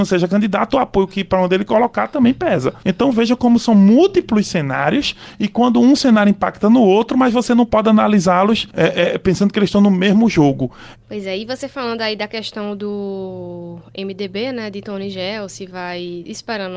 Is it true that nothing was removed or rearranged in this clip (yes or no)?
no